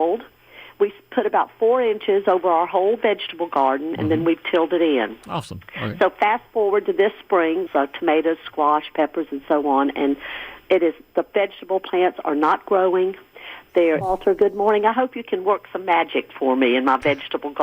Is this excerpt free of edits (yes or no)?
no